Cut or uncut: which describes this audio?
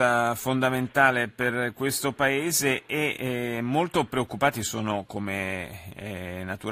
uncut